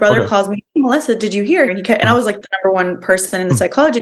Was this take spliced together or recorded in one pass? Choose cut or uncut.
cut